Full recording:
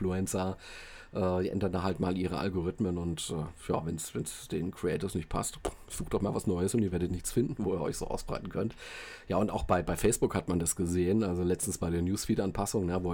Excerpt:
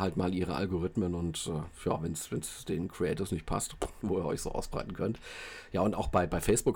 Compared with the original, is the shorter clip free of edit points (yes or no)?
no